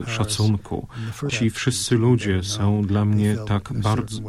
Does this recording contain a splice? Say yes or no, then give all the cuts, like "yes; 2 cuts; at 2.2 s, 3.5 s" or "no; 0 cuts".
yes; 1 cut; at 1.3 s